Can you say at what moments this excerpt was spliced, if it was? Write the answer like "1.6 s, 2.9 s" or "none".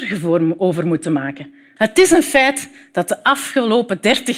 1.8 s